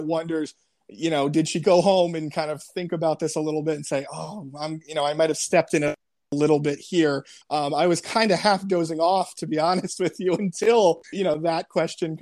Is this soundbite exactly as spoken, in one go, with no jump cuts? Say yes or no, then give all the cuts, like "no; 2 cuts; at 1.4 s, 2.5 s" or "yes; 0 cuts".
no; 2 cuts; at 7.4 s, 11.1 s